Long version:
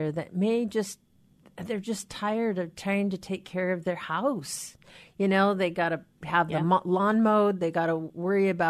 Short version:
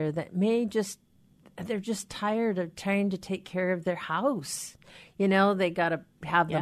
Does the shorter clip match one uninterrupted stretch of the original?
yes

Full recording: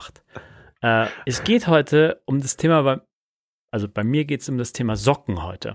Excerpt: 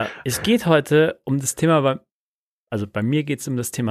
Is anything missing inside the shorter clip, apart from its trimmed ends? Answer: no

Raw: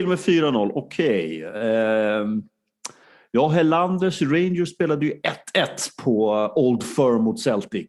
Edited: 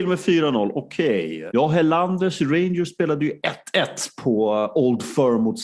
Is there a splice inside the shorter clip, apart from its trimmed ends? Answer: yes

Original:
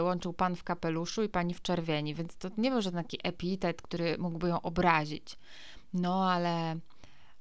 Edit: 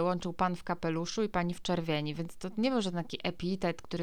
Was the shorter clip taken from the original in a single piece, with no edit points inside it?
yes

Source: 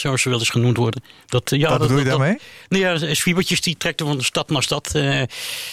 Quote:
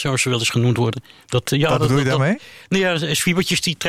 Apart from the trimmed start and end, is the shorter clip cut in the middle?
no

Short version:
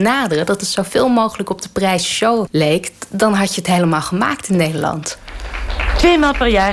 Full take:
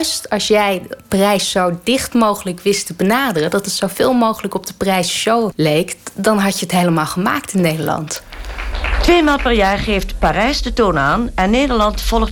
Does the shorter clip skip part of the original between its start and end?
no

